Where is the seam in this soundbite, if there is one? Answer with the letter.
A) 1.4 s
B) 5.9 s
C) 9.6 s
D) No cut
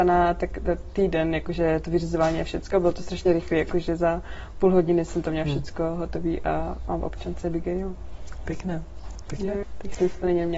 C